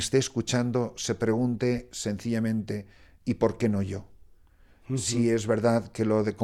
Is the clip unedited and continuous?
yes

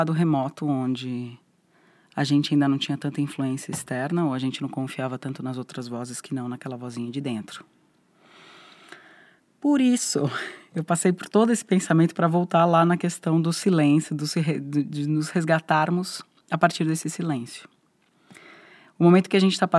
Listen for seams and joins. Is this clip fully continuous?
yes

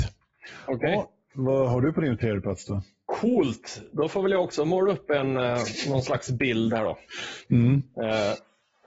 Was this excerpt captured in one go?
yes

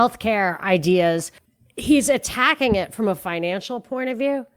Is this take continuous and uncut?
yes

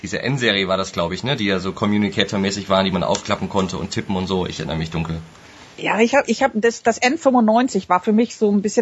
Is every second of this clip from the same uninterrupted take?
yes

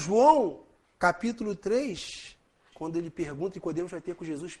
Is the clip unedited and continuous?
no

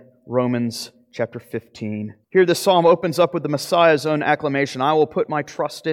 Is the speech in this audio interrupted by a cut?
yes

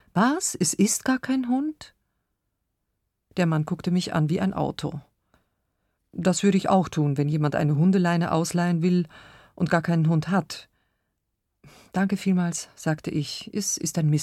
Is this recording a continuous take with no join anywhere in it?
yes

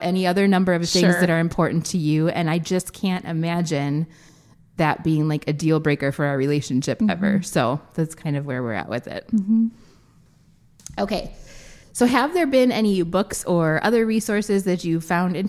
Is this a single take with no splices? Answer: yes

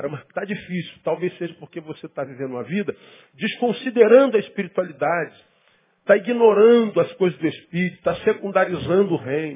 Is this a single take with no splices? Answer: yes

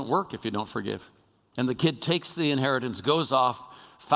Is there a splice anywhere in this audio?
yes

